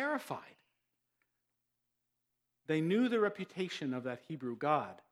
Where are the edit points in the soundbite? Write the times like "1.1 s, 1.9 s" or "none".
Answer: none

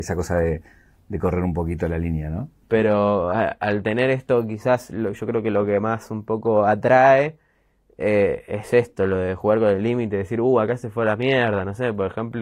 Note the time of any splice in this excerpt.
2.6 s

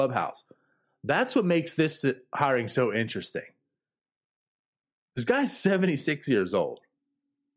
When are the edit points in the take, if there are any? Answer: none

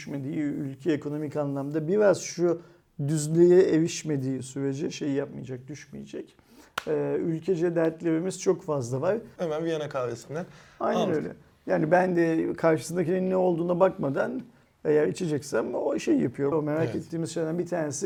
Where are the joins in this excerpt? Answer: 9.4 s, 16.5 s

